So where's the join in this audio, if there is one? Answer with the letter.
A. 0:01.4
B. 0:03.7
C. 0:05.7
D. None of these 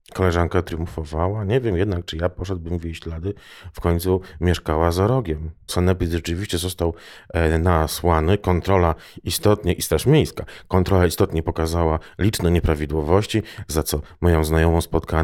C